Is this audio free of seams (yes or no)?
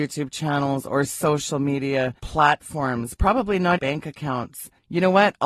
no